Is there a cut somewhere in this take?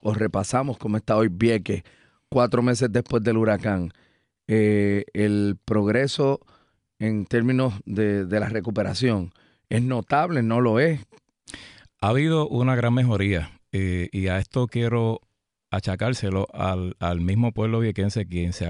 no; 0 cuts

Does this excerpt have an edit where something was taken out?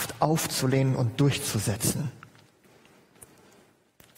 no; 0 cuts

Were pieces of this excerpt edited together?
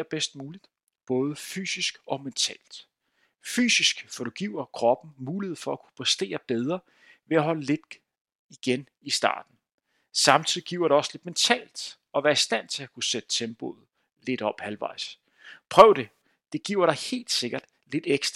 yes; 1 cut; at 15.6 s

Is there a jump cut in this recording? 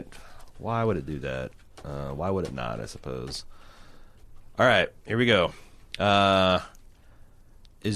no; 0 cuts

